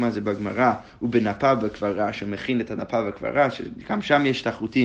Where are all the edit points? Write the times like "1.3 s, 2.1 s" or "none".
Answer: none